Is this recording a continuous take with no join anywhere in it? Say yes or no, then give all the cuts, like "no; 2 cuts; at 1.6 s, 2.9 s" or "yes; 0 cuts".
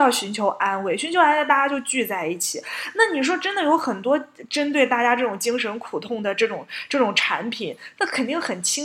no; 1 cut; at 8.0 s